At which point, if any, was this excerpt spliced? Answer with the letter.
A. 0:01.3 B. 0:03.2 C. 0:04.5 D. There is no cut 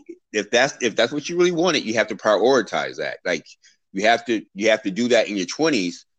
C